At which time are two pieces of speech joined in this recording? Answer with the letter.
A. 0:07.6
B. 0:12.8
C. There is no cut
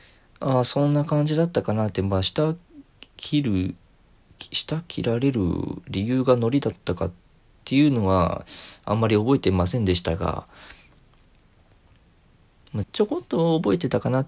B